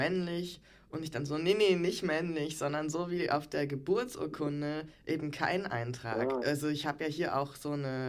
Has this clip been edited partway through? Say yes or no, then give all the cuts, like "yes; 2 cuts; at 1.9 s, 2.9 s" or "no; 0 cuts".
yes; 1 cut; at 6.4 s